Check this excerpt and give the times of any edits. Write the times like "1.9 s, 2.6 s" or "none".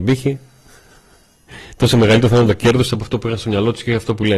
none